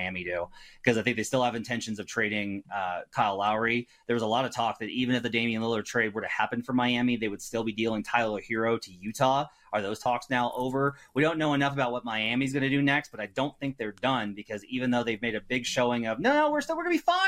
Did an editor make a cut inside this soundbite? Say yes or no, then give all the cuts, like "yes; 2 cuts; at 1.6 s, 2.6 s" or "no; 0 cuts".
no; 0 cuts